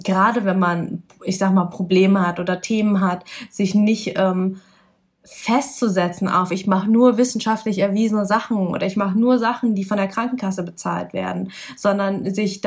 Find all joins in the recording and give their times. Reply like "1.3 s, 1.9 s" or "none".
none